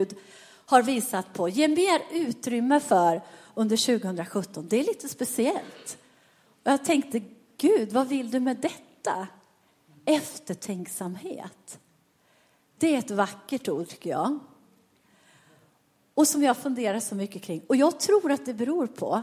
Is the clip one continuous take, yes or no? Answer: yes